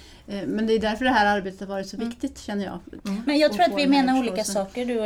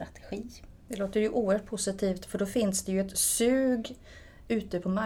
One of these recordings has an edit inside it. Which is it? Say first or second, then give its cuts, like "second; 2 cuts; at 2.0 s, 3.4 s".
first; 1 cut; at 3.0 s